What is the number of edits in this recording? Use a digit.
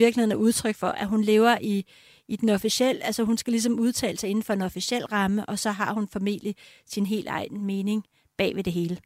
0